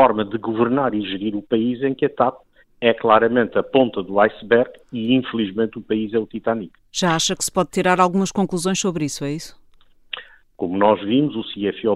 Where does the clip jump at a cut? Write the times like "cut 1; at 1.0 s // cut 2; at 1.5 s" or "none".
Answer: cut 1; at 10.4 s